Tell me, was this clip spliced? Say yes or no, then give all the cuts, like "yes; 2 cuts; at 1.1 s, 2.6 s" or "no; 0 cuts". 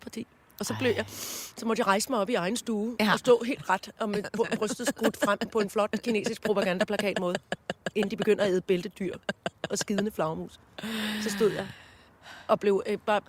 no; 0 cuts